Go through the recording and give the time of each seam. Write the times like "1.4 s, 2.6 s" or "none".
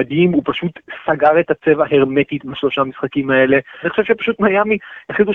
3.8 s